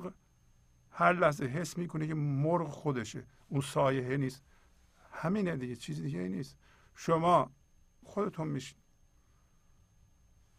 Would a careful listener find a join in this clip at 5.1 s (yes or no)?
no